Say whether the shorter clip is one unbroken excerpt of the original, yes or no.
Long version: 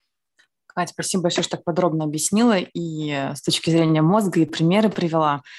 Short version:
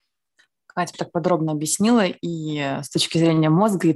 no